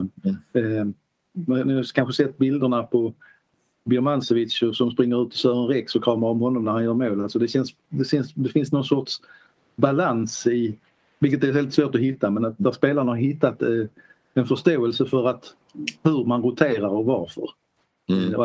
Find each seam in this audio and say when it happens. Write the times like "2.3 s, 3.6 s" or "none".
none

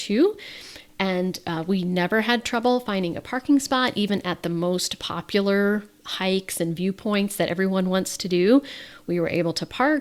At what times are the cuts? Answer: none

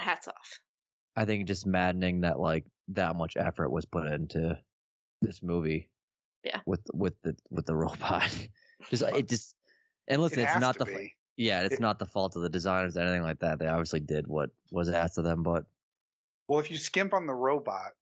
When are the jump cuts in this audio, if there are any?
9.1 s

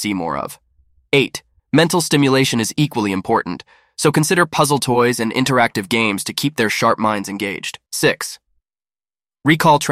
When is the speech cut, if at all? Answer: 1.6 s, 7.9 s

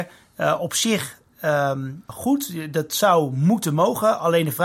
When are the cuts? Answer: 2.1 s

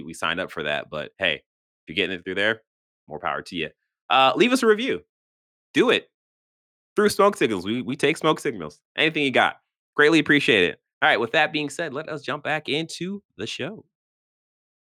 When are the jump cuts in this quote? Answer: none

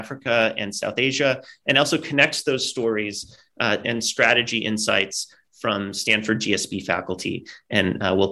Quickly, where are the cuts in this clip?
3.8 s

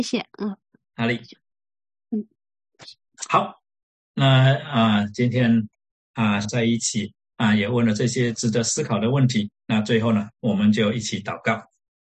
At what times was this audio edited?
6.4 s

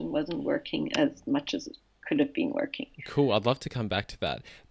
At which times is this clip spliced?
none

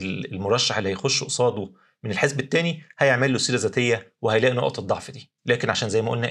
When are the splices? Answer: 5.4 s

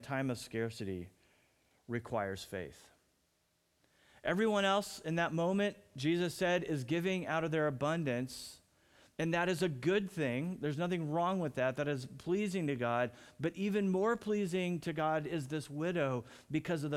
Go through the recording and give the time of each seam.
none

